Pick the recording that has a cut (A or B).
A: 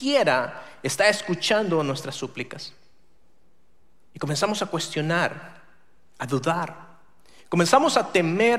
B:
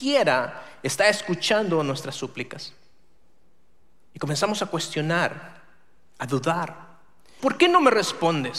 B